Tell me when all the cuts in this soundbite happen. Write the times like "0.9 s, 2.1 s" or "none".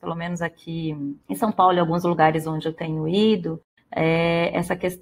1.2 s